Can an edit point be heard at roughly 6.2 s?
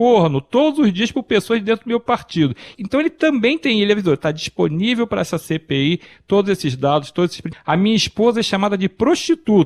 no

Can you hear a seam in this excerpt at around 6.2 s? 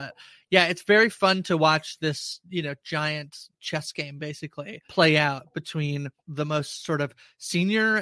yes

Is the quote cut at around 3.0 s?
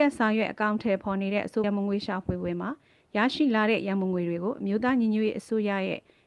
no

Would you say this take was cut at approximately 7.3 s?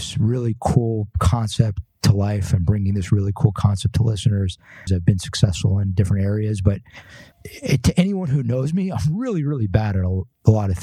yes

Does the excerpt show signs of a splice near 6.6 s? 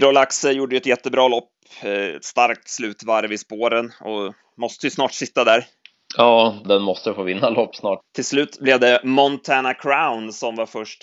yes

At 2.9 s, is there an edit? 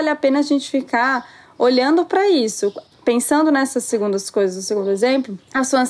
yes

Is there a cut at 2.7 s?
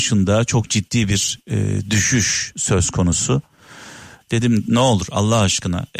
no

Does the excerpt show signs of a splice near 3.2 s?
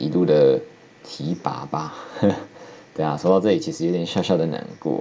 no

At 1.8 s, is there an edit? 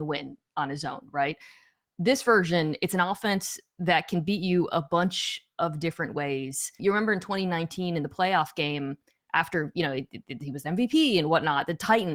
no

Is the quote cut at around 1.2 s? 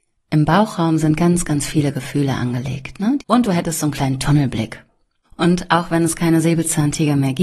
no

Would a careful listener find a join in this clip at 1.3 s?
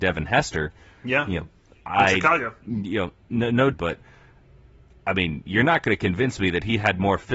no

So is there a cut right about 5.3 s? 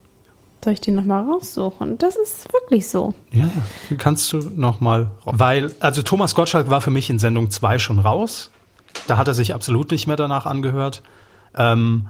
yes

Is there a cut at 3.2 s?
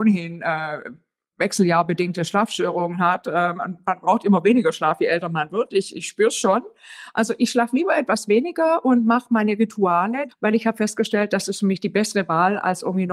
no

